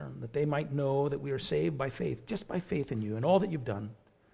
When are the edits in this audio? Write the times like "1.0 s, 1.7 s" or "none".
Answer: none